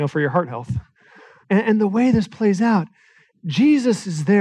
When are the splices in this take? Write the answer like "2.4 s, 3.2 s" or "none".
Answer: 1.4 s